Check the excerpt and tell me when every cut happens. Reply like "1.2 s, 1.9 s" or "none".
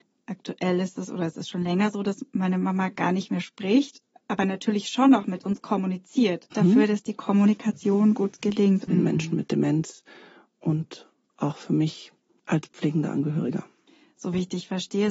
6.5 s, 8.9 s

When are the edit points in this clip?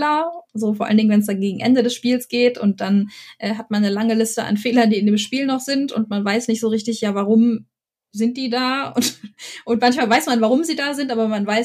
none

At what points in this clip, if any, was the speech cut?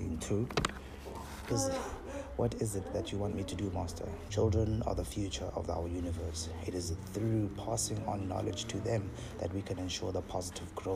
1.5 s, 4.3 s

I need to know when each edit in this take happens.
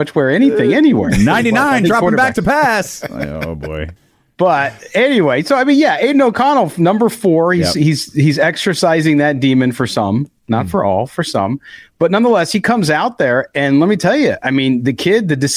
4.0 s

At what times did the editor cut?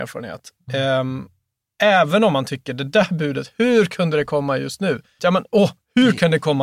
5.2 s

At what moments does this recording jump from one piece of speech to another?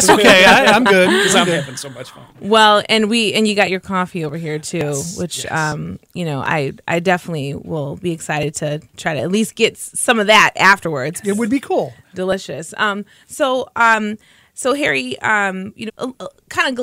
11.2 s, 15.9 s

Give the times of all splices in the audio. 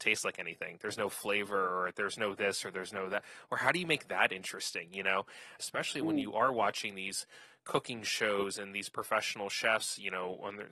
5.6 s

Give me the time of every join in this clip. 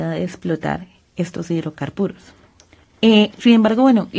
2.8 s

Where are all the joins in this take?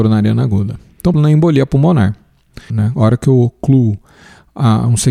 1.1 s, 2.7 s

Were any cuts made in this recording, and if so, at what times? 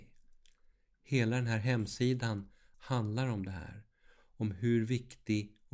2.7 s

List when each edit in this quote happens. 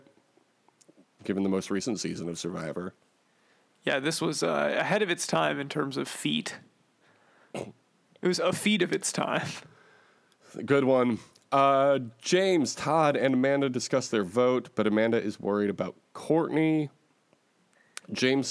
none

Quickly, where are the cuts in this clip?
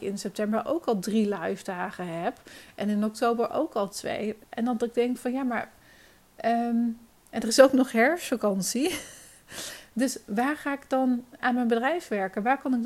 11.4 s

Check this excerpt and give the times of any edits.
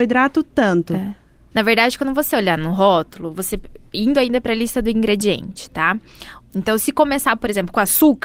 1.5 s, 6.4 s

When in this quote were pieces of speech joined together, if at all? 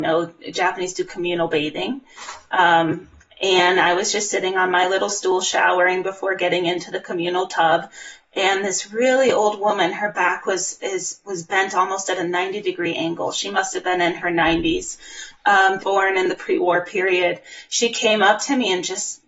15.8 s

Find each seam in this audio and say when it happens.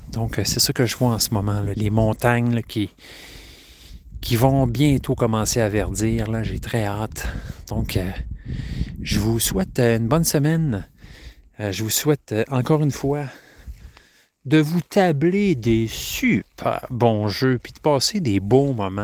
1.7 s

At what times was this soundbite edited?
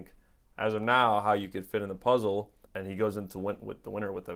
2.7 s

